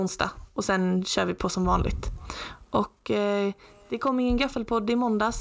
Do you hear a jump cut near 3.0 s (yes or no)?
no